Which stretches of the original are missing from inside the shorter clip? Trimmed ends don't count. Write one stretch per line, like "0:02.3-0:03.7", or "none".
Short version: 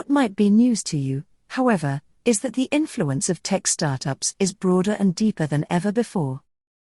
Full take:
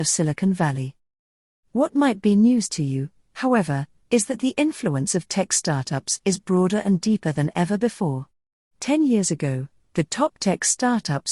none